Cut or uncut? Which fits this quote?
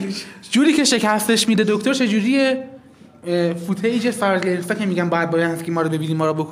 uncut